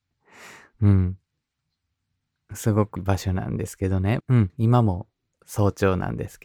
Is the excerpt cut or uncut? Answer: cut